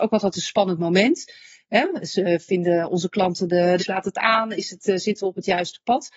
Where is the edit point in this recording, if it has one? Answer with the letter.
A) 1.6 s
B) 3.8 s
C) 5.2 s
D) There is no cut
B